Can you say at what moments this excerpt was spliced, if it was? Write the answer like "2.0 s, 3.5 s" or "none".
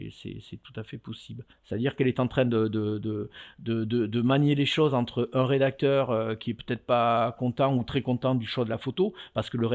1.5 s